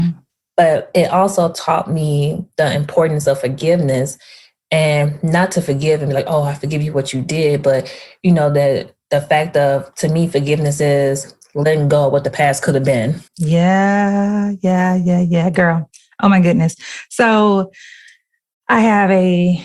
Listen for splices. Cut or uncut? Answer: cut